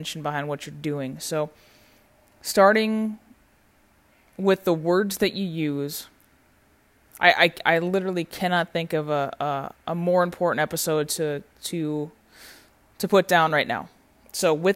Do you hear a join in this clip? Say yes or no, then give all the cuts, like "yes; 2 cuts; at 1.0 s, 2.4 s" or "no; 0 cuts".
no; 0 cuts